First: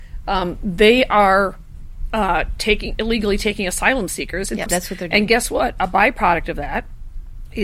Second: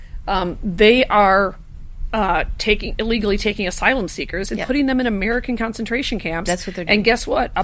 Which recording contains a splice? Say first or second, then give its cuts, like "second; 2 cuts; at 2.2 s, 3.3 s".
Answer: first; 1 cut; at 4.7 s